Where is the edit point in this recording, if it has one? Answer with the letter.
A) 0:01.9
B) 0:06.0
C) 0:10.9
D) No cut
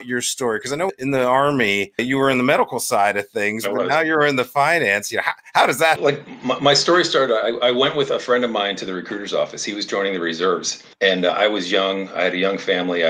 C